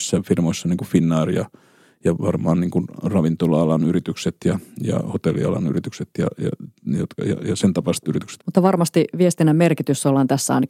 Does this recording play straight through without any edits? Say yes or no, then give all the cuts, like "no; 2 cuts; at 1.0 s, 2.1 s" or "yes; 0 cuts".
no; 1 cut; at 8.4 s